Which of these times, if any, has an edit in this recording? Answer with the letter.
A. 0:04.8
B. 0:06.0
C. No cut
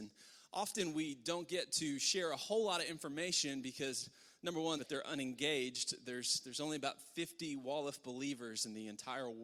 A